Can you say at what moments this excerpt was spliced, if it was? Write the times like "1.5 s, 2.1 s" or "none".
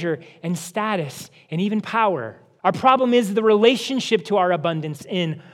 2.6 s